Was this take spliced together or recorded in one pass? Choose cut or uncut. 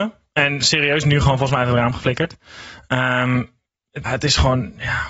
cut